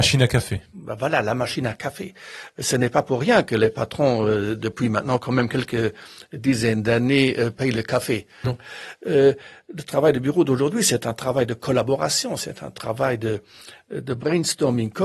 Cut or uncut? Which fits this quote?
cut